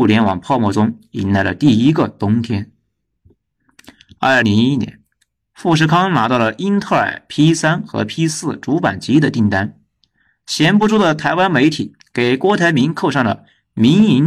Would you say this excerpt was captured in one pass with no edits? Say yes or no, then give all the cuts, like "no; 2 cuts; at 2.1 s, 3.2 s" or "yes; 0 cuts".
no; 1 cut; at 4.4 s